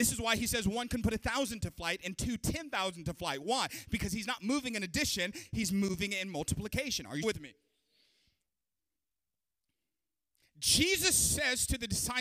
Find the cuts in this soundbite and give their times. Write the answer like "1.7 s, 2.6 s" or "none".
7.2 s